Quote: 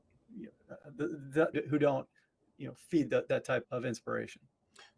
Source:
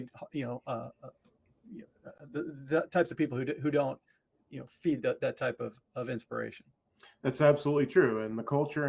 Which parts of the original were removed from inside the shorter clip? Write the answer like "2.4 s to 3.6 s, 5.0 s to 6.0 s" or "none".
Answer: 2.9 s to 3.5 s, 5.6 s to 5.9 s